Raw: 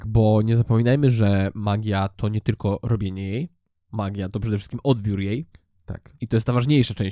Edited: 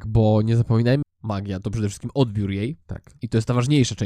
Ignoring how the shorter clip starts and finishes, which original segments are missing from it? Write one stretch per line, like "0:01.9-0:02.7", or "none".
0:01.0-0:03.7
0:05.5-0:05.8